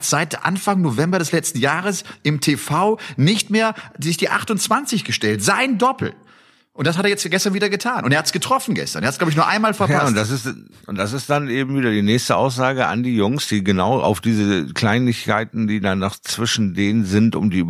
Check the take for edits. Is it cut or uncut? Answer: uncut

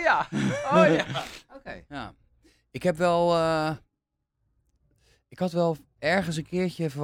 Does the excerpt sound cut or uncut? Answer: cut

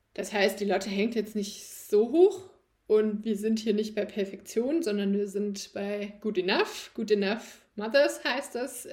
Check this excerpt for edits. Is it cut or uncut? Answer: uncut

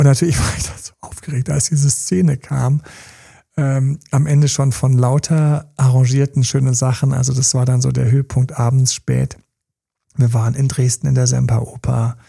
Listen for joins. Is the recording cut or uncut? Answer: uncut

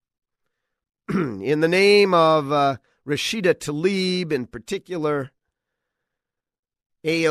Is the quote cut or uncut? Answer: uncut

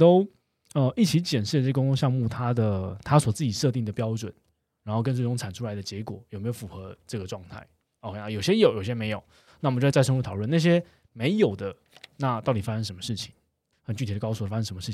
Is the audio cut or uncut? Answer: cut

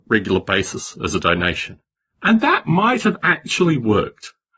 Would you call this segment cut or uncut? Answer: uncut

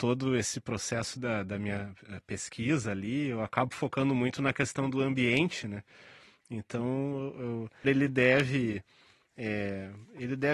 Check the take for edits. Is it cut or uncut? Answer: cut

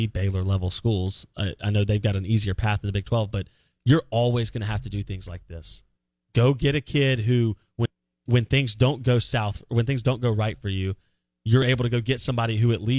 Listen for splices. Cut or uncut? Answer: uncut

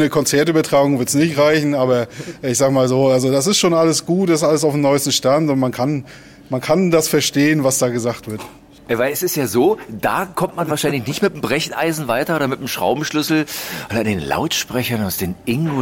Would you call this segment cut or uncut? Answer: uncut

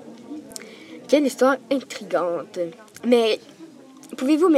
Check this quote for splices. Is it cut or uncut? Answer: uncut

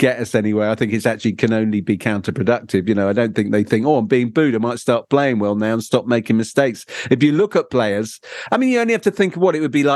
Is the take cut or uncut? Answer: uncut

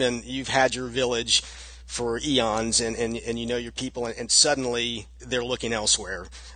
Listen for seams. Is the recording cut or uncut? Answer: uncut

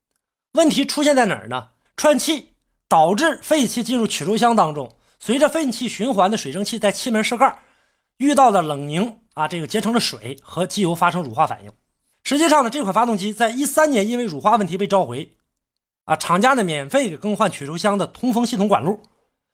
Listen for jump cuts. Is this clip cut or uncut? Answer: cut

